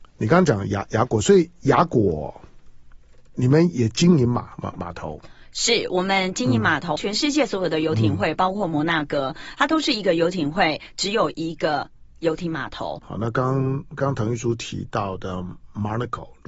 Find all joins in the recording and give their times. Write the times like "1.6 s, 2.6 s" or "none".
7.0 s, 13.0 s